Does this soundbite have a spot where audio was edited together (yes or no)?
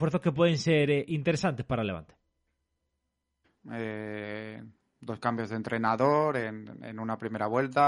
yes